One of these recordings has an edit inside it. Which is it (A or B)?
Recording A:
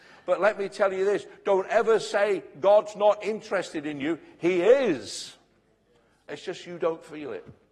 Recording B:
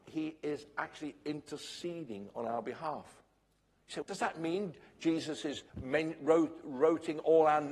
B